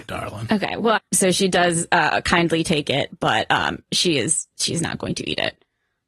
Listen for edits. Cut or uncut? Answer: cut